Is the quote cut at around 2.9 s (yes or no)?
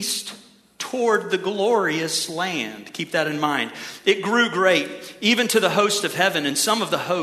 no